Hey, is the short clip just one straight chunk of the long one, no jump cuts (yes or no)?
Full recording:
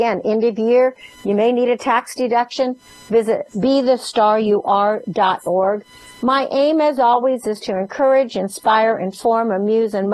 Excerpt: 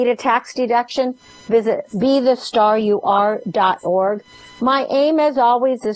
yes